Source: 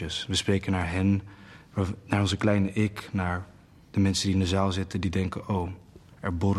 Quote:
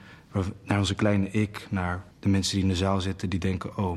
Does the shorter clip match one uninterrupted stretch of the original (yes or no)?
no